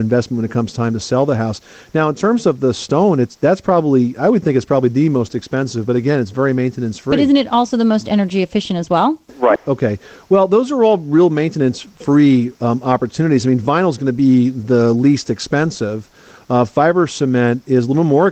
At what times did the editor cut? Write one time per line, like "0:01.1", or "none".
0:09.6